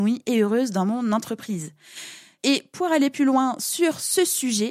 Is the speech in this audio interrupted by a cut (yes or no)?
yes